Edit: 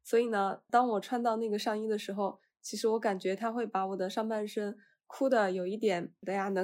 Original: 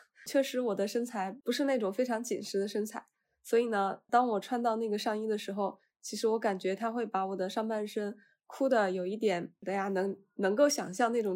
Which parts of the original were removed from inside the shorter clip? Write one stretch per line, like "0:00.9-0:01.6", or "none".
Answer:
none